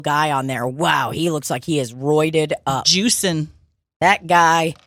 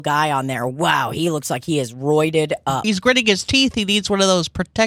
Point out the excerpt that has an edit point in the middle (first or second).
second